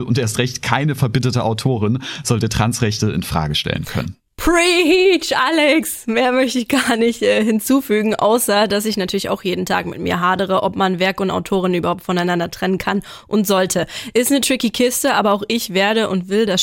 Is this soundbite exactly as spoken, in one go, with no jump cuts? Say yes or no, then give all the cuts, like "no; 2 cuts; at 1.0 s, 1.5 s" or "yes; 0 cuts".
yes; 0 cuts